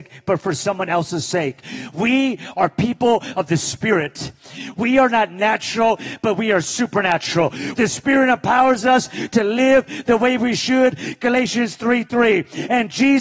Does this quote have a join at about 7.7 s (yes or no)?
yes